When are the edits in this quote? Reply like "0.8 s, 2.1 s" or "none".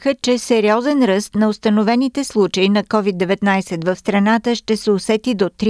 none